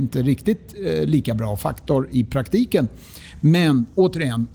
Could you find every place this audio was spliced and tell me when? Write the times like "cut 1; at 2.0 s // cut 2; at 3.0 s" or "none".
none